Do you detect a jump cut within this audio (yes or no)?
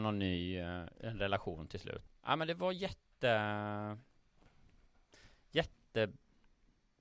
yes